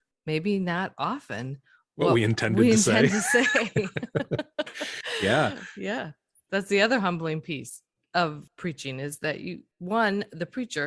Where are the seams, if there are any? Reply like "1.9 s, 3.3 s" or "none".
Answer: none